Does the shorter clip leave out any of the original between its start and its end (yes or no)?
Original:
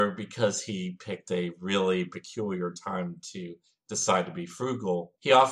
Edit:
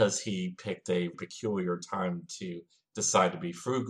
yes